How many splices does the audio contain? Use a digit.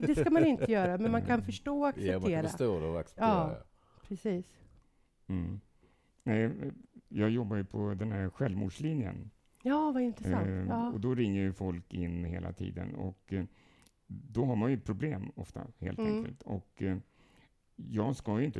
0